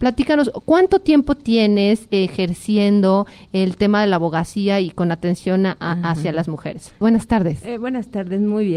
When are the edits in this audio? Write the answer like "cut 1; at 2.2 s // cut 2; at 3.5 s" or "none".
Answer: cut 1; at 7.0 s